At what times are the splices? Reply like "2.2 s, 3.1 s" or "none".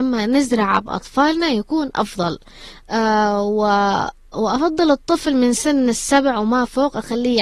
none